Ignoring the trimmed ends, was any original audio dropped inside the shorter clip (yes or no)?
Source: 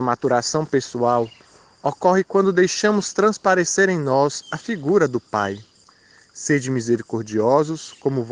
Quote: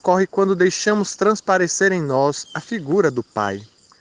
no